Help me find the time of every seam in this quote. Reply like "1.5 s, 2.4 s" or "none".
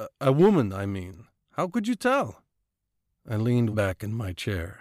3.7 s